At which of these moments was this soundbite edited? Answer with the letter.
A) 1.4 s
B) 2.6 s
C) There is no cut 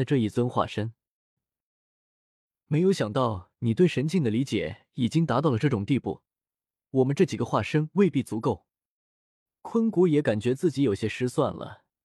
A